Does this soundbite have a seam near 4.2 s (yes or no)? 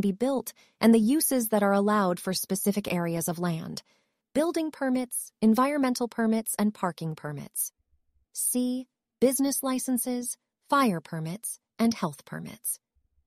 yes